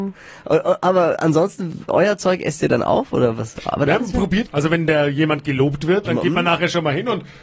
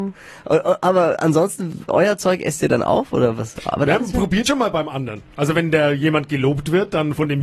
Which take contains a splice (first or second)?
first